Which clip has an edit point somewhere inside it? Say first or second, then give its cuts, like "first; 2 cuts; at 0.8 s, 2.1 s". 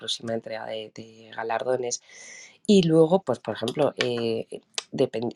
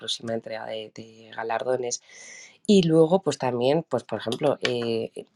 first; 1 cut; at 3.2 s